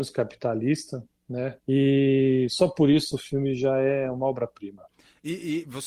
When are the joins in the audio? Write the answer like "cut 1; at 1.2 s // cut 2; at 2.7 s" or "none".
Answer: cut 1; at 1.6 s